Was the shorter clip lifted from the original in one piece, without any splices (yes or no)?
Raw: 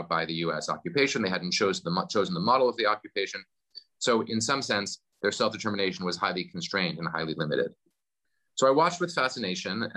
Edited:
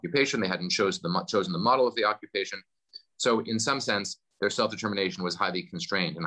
yes